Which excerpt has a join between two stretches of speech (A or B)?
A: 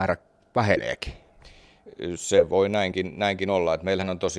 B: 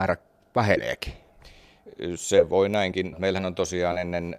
B